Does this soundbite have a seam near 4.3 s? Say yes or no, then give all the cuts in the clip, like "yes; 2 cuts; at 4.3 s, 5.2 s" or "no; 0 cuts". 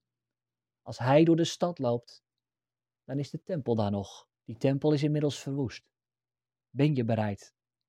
yes; 2 cuts; at 4.3 s, 6.6 s